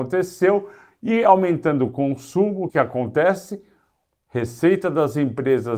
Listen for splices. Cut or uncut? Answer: cut